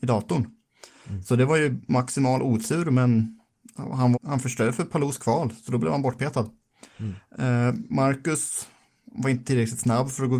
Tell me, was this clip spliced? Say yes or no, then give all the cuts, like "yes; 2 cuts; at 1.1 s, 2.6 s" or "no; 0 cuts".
yes; 1 cut; at 4.1 s